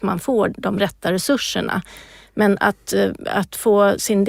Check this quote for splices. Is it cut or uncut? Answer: uncut